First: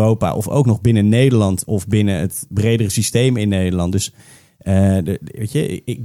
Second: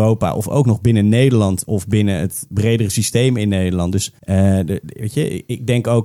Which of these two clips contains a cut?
second; 1 cut; at 4.2 s

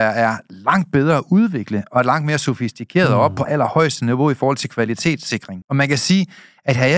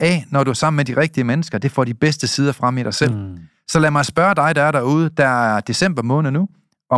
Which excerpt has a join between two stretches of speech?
first; 2 cuts; at 3.4 s, 5.6 s

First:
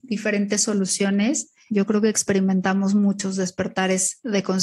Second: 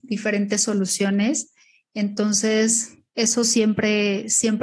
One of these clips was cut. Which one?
first; 1 cut; at 1.7 s

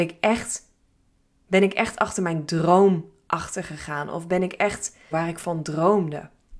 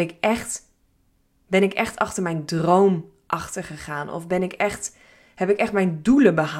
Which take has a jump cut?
first; 1 cut; at 5.1 s

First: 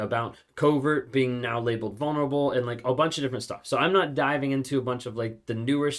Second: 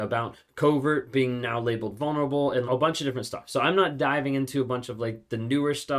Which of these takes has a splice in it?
second; 1 cut; at 2.6 s

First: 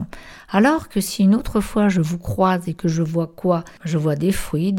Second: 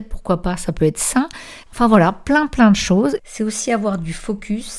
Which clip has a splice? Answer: second; 2 cuts; at 1.6 s, 3.2 s

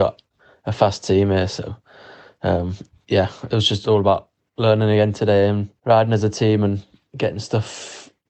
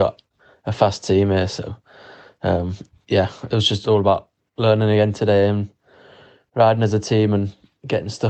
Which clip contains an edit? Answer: first; 1 cut; at 5.8 s

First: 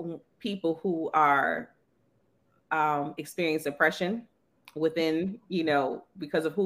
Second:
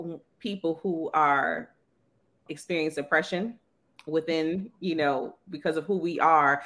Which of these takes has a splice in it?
second; 1 cut; at 2.5 s

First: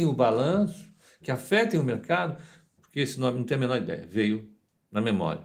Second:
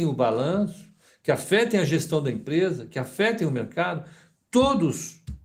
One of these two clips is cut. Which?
first; 2 cuts; at 1.2 s, 2.8 s

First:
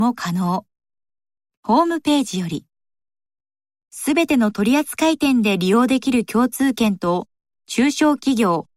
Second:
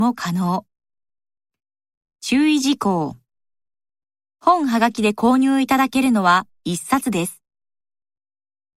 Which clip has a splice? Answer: first; 1 cut; at 1.5 s

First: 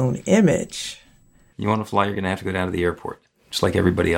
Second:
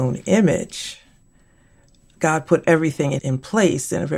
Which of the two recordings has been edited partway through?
first; 1 cut; at 1.5 s

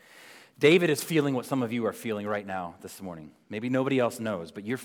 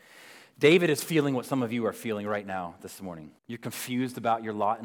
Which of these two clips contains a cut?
second; 1 cut; at 3.4 s

